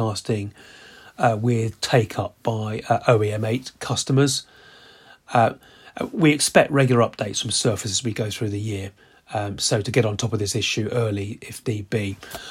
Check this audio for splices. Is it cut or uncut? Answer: uncut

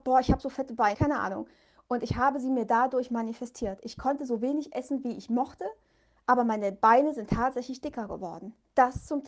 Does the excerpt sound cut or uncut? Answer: cut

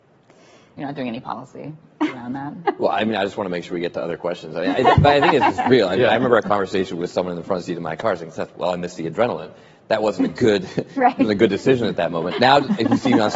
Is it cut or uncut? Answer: cut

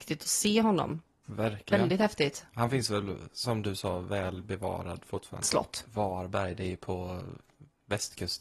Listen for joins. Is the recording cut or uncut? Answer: cut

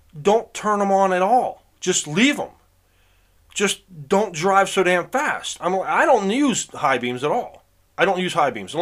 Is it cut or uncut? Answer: uncut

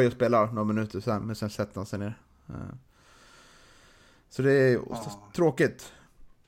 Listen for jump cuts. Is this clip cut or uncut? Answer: uncut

